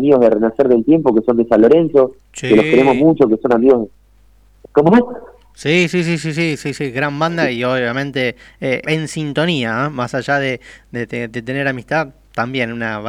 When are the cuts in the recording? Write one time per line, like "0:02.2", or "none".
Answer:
0:08.8